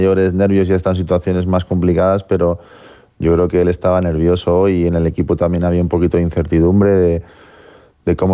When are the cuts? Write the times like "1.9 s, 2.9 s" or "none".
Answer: none